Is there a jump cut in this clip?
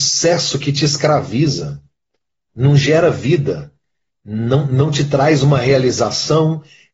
no; 0 cuts

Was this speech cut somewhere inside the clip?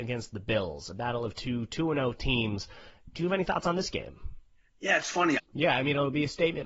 yes; 1 cut; at 5.4 s

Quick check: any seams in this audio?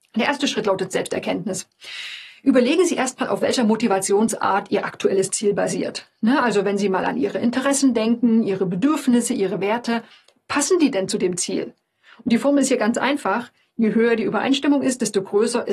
no; 0 cuts

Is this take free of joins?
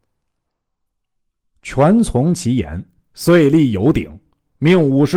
yes; 0 cuts

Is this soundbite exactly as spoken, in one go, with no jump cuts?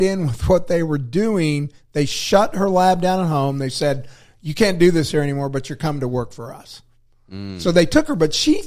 yes; 0 cuts

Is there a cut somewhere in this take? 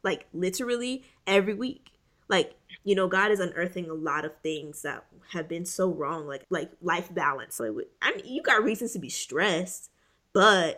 yes; 2 cuts; at 6.4 s, 7.6 s

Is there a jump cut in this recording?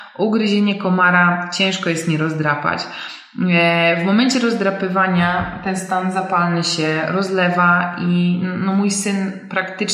no; 0 cuts

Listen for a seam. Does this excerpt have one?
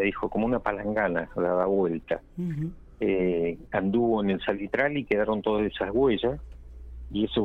no; 0 cuts

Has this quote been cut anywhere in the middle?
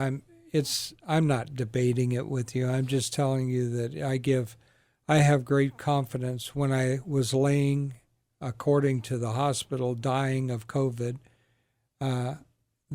no; 0 cuts

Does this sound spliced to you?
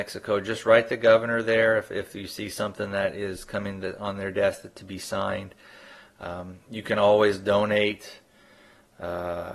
no; 0 cuts

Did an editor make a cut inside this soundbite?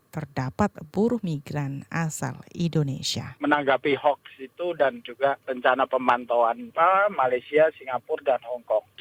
no; 0 cuts

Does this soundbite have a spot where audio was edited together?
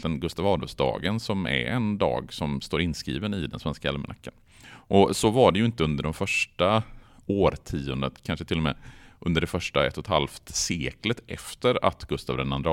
yes; 1 cut; at 4.6 s

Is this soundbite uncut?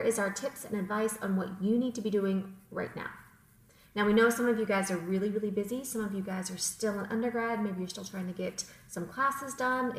yes; 0 cuts

